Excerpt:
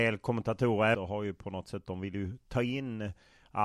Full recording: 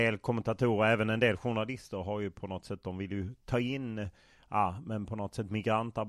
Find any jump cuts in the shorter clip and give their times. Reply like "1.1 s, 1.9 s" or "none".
0.9 s